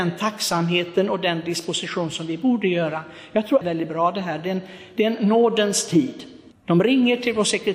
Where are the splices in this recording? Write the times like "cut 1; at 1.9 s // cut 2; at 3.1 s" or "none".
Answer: cut 1; at 3.6 s // cut 2; at 6.5 s